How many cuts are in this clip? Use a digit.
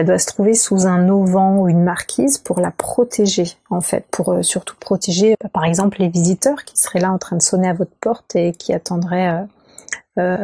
1